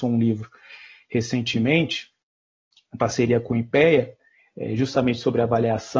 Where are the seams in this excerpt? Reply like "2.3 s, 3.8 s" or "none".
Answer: none